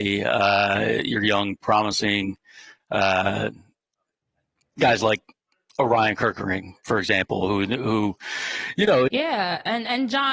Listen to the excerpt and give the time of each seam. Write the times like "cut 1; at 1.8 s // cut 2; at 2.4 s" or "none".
cut 1; at 9.1 s